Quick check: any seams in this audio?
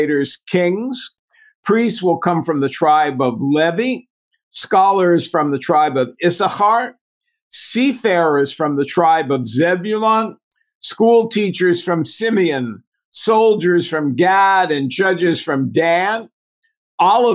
no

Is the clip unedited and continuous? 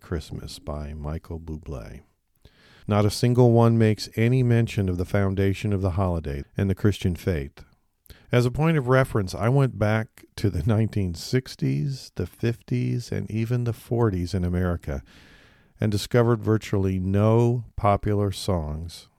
no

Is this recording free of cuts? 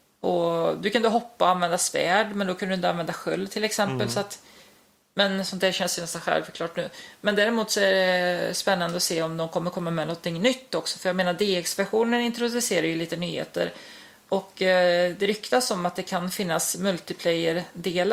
yes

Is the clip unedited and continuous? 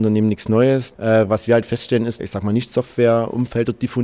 no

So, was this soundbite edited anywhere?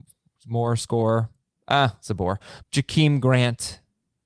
yes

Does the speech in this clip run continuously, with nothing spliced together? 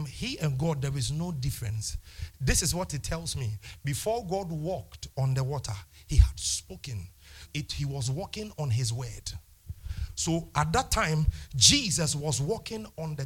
no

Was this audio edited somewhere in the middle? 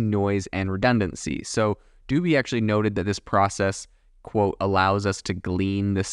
no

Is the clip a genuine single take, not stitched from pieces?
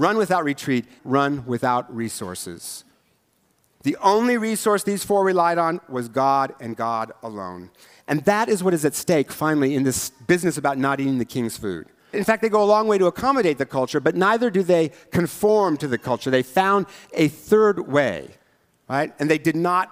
no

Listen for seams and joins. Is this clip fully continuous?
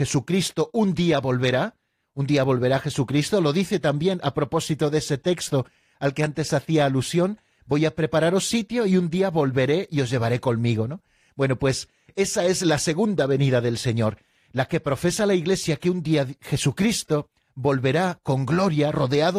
yes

